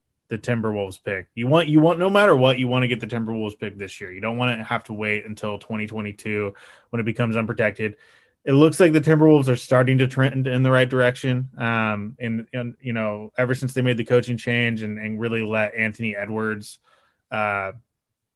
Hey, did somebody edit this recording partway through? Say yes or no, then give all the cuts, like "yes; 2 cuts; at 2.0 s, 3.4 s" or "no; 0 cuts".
no; 0 cuts